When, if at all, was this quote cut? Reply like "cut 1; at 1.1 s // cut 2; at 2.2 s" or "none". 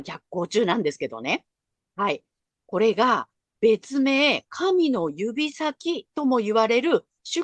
none